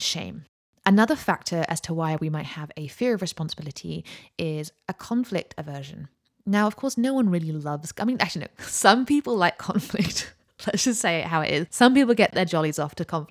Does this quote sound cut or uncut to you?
uncut